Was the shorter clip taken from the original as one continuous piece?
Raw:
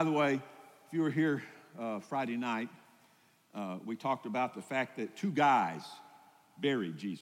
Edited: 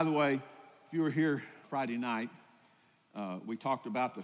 no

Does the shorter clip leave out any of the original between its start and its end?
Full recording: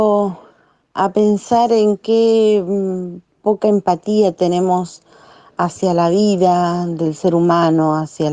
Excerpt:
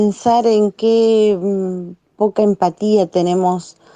no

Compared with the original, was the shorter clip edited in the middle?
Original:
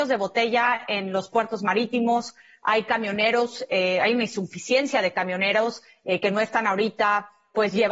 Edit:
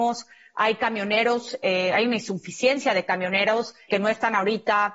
yes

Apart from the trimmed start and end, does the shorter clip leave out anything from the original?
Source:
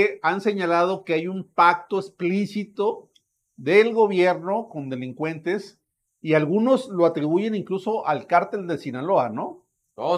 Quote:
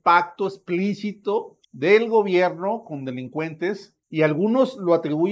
yes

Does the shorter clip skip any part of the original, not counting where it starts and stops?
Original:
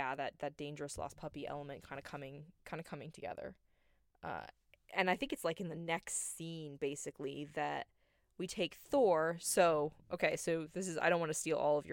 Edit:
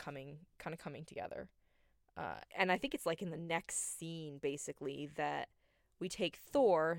yes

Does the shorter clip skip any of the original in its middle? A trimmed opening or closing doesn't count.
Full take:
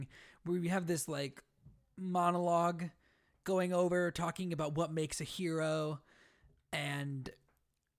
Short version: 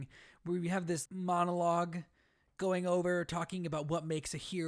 yes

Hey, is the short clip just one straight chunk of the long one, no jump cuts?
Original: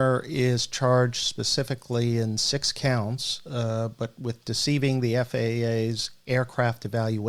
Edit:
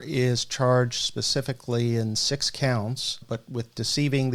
no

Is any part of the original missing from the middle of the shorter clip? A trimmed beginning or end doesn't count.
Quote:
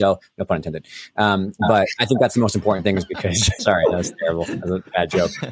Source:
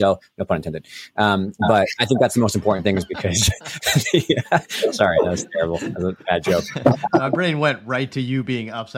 yes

